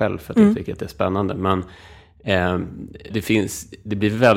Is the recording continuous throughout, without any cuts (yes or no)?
no